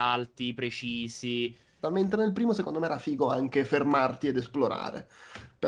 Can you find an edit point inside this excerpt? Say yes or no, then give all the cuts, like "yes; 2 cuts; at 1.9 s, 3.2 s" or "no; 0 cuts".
yes; 1 cut; at 1.8 s